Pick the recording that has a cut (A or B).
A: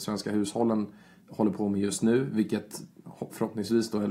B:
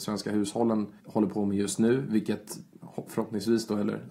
B